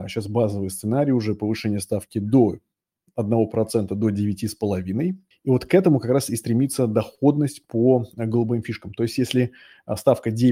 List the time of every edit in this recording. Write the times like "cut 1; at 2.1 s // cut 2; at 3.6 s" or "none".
cut 1; at 5.3 s

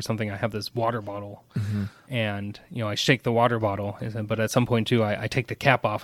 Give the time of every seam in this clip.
none

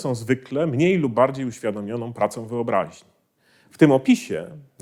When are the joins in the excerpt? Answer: cut 1; at 3.6 s

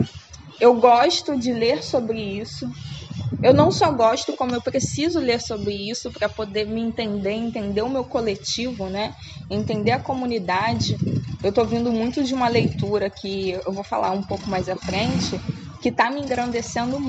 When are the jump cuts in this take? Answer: none

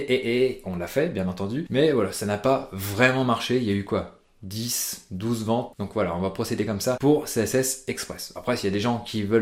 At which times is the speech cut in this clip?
cut 1; at 5.7 s

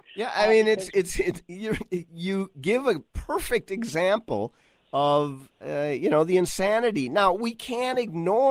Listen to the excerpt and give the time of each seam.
none

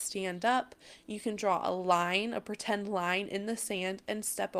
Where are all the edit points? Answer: none

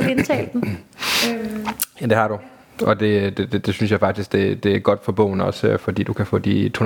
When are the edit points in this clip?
none

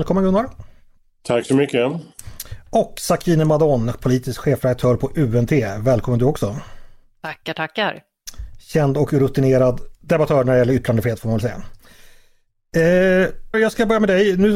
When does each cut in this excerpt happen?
cut 1; at 13.5 s

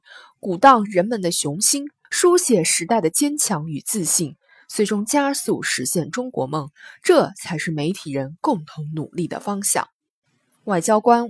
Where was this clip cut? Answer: cut 1; at 2.0 s

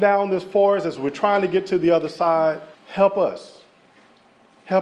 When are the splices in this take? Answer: cut 1; at 2.7 s

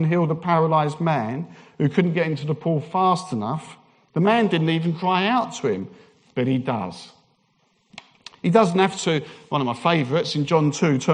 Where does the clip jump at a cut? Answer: none

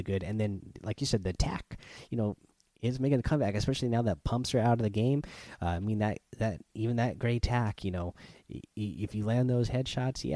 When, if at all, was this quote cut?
none

